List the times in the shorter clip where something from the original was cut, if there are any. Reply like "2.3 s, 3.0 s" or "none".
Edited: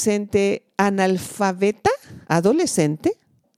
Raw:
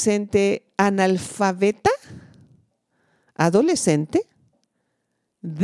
2.2 s